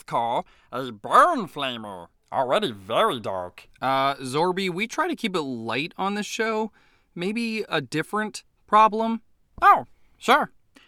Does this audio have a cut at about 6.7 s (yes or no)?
no